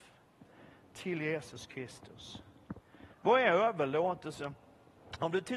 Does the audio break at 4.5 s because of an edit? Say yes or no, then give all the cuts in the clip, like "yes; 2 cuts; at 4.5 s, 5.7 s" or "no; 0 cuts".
no; 1 cut; at 3.1 s